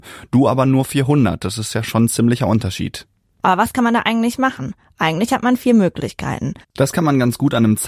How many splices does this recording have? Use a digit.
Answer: 1